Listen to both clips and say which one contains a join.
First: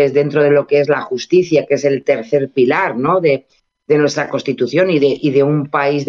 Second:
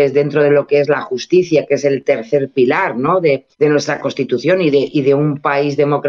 second; 1 cut; at 3.5 s

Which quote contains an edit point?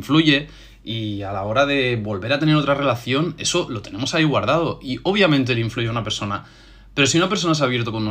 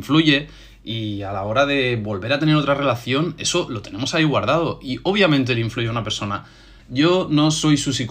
second; 1 cut; at 6.8 s

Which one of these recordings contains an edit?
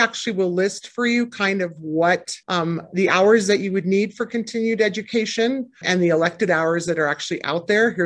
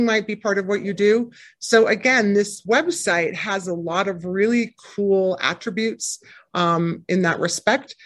first; 2 cuts; at 2.4 s, 5.8 s

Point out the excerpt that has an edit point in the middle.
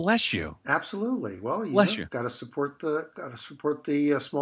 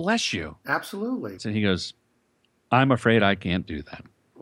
second; 1 cut; at 1.4 s

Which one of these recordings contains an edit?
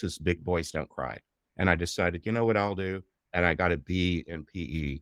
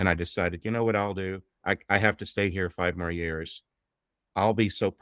first; 2 cuts; at 1.5 s, 3.2 s

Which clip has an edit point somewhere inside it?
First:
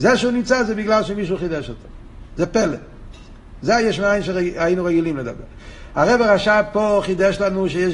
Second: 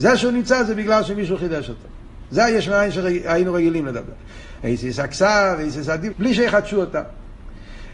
second; 3 cuts; at 2.3 s, 4.6 s, 6.1 s

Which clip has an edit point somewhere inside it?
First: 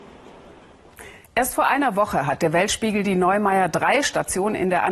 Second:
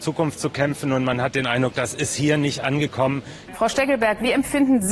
second; 1 cut; at 3.5 s

